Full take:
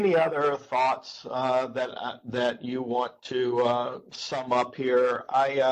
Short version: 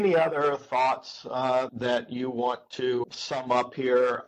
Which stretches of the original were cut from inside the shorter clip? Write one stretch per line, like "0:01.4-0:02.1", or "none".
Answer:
0:01.7-0:02.2
0:03.6-0:04.0